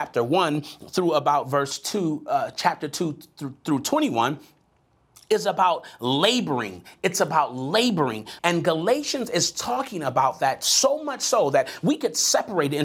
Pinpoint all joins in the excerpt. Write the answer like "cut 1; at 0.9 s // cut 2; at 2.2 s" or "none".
cut 1; at 8.4 s